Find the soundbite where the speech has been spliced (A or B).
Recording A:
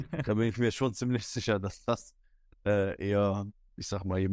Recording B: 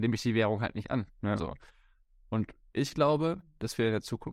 B